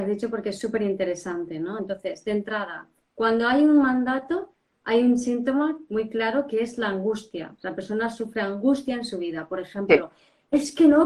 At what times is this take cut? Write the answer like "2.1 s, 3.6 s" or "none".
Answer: none